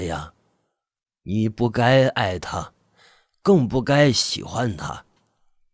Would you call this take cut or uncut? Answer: uncut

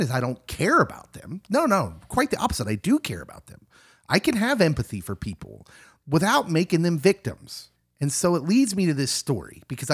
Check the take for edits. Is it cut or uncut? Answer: uncut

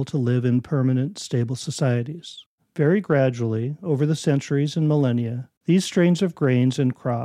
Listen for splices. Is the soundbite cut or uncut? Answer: cut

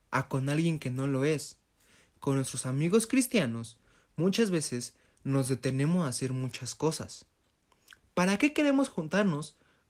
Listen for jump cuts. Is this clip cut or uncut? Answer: cut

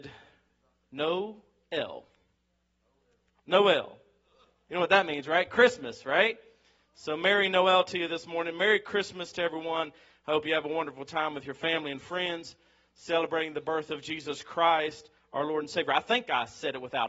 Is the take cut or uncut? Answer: uncut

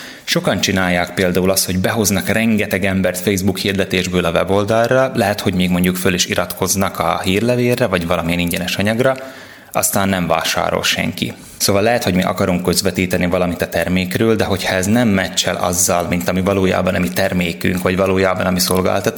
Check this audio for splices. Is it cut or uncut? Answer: cut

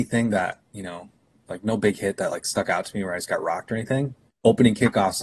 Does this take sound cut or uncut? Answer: cut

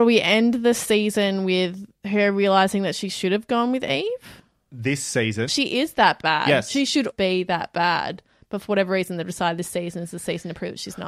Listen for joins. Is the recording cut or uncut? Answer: cut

